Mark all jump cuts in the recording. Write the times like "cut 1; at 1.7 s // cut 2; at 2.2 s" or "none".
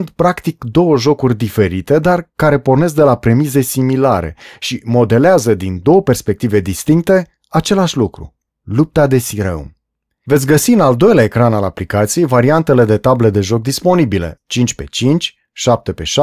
cut 1; at 10.1 s // cut 2; at 14.4 s